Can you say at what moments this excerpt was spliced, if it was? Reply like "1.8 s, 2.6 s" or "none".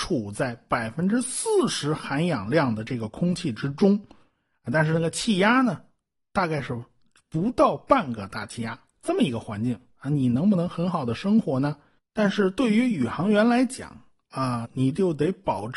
12.0 s, 14.6 s